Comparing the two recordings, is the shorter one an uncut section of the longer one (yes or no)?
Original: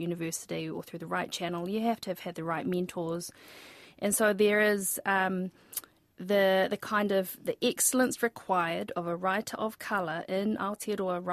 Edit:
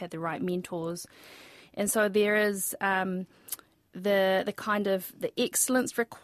yes